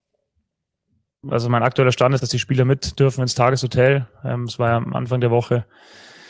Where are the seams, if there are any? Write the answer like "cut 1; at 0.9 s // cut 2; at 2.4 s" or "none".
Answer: cut 1; at 2.2 s